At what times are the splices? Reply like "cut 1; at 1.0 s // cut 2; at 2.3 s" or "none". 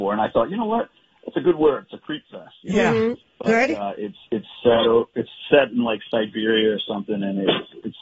cut 1; at 3.2 s